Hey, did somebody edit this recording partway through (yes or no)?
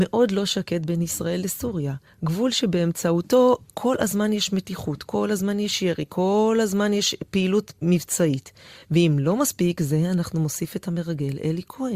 no